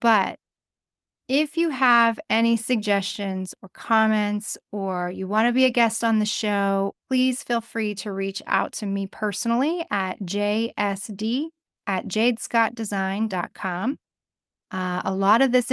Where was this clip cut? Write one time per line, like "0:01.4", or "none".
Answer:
0:06.9